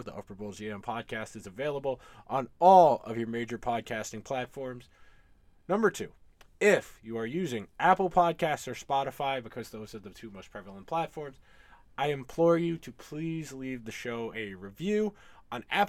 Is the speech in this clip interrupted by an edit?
no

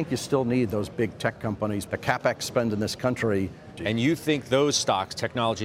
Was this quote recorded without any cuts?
no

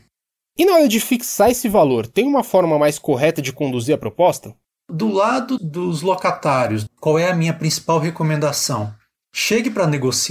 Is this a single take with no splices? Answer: no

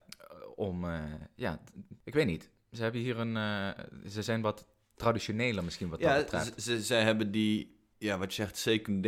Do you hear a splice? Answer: no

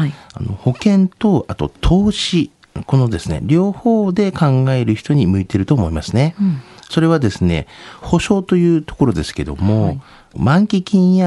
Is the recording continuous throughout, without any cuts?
no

